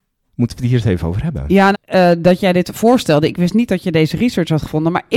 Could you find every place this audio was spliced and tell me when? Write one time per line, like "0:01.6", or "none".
0:01.7